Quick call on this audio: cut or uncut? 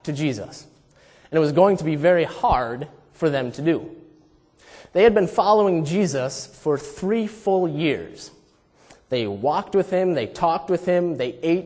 uncut